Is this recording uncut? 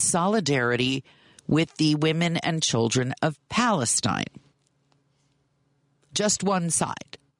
yes; 0 cuts

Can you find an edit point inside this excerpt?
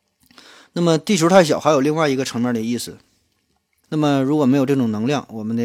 yes; 1 cut; at 3.8 s

